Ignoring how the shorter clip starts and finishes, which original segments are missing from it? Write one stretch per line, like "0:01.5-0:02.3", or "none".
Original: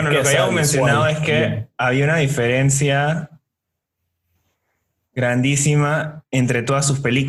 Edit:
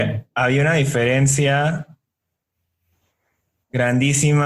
none